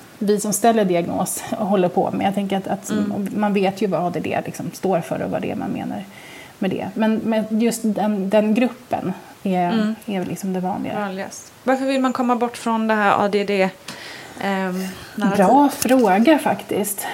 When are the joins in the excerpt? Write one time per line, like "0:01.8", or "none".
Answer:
none